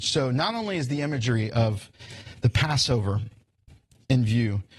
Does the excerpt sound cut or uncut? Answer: uncut